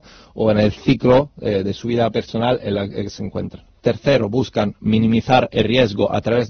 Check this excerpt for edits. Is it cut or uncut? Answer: cut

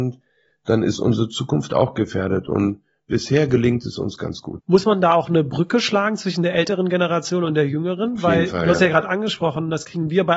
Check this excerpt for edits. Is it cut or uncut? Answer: uncut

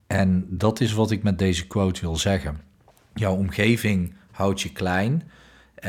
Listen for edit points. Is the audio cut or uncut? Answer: uncut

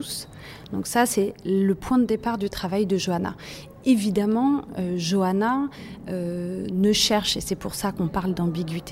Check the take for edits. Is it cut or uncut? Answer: uncut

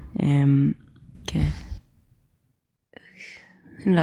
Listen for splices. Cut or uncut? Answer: cut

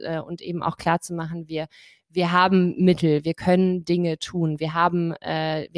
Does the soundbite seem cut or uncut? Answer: uncut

